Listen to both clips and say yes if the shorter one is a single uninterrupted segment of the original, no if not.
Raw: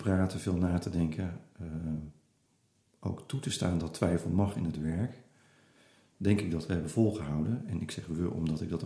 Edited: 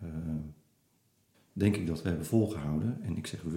no